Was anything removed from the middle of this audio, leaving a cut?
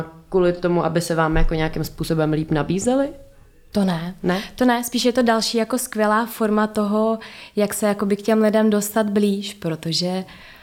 no; 0 cuts

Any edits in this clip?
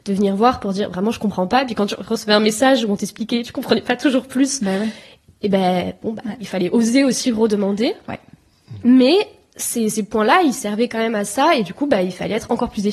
no; 0 cuts

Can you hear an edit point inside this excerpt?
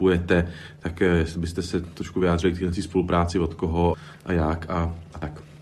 no; 0 cuts

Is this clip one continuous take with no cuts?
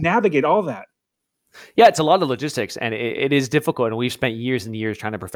yes; 0 cuts

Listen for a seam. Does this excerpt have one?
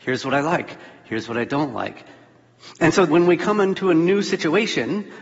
yes; 1 cut; at 3.1 s

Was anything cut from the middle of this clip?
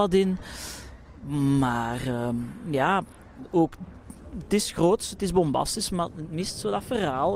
no; 0 cuts

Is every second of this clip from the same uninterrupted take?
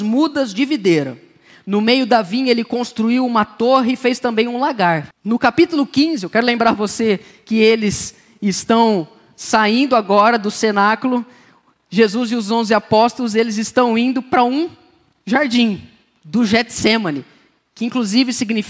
no; 1 cut; at 5.1 s

